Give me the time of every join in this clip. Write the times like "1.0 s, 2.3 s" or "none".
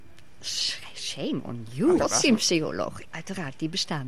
2.0 s, 3.0 s